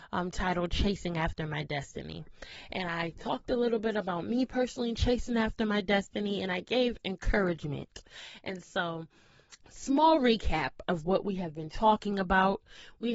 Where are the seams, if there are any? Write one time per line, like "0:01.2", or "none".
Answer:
0:09.6